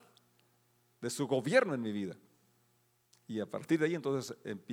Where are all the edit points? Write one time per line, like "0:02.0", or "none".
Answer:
none